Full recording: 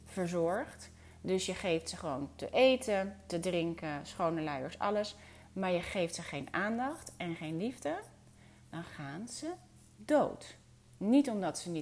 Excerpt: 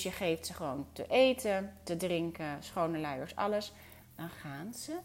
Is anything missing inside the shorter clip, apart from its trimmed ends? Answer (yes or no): yes